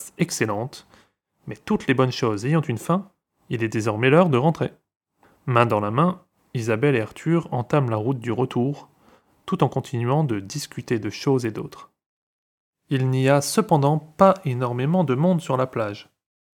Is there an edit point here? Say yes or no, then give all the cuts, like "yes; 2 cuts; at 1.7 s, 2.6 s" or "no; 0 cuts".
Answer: yes; 1 cut; at 12.7 s